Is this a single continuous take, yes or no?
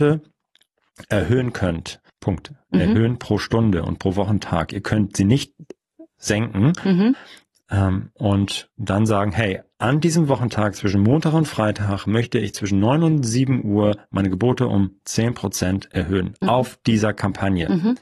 no